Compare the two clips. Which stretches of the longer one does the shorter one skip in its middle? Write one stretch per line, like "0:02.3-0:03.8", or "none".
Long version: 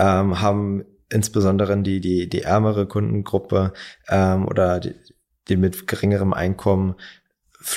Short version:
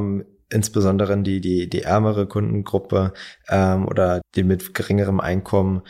0:04.8-0:05.3